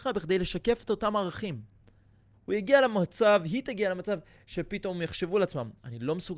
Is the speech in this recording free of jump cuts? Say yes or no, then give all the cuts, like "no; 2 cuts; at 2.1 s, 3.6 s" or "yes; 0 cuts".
no; 1 cut; at 2.3 s